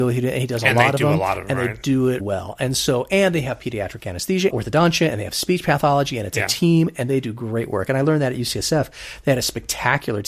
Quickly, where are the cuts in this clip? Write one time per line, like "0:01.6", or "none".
0:02.2
0:04.5